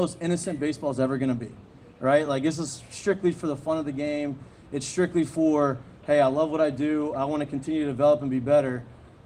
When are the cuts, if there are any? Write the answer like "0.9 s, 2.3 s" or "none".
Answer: none